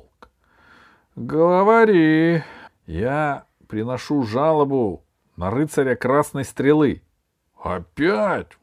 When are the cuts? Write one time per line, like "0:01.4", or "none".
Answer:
0:02.7